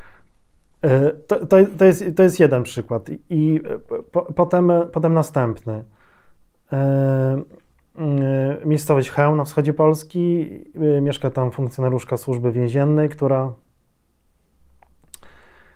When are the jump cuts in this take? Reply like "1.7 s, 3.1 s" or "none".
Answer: none